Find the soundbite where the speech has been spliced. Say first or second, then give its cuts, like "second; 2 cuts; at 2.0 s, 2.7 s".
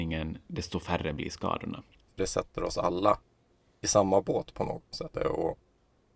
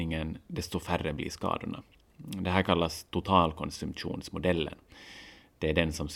first; 2 cuts; at 2.1 s, 5.1 s